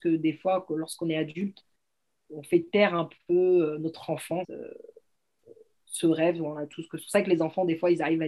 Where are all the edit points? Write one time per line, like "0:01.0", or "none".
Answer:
0:04.4